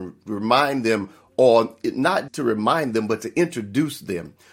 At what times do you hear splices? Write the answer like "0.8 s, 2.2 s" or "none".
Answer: 2.3 s